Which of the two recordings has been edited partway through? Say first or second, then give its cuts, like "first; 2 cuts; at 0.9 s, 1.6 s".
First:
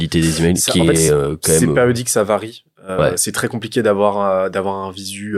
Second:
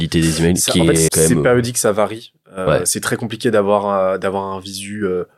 second; 1 cut; at 1.1 s